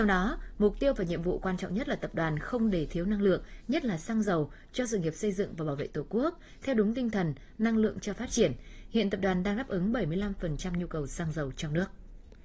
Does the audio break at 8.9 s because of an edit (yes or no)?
no